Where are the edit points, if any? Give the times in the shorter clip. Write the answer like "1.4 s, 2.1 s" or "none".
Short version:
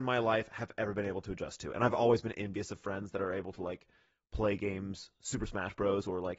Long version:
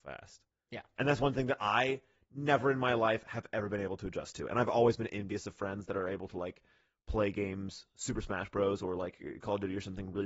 none